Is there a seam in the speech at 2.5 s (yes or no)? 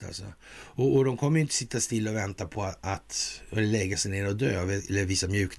no